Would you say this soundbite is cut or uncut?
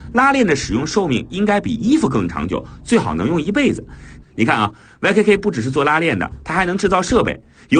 cut